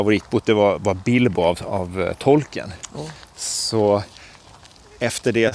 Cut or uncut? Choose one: uncut